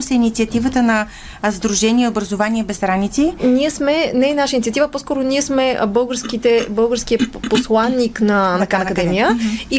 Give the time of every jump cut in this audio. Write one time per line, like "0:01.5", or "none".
none

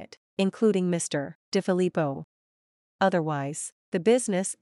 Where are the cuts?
0:01.4

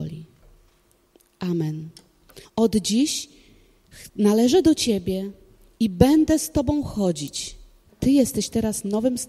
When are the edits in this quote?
0:02.4
0:07.9

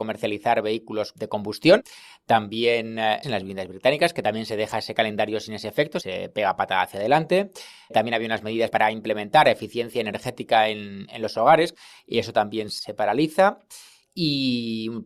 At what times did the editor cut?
0:03.2

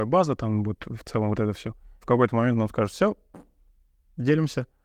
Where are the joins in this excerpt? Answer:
0:02.0

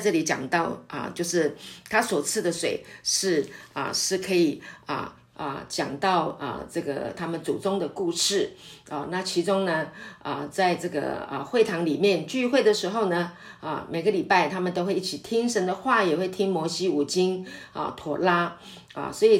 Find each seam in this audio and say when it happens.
0:05.3

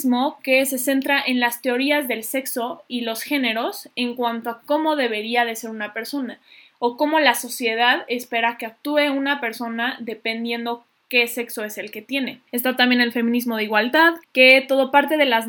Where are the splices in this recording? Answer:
0:12.5
0:14.2

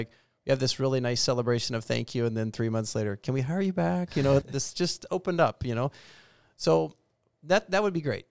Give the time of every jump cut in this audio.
0:04.4

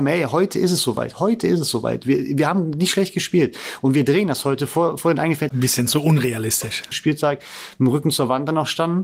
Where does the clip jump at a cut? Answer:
0:05.5
0:06.9

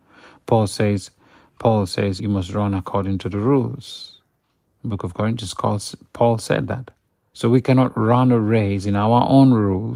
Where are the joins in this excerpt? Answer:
0:02.2
0:07.3

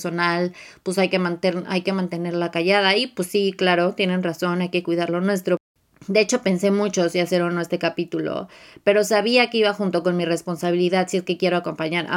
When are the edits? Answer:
none

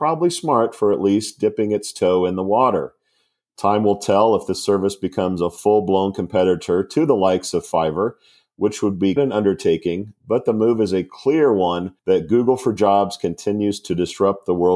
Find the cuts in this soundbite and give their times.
0:09.2
0:12.0

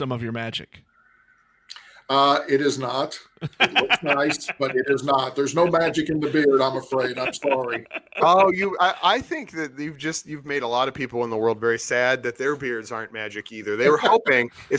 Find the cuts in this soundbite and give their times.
none

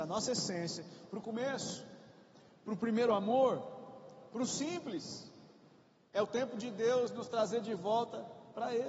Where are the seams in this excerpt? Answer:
none

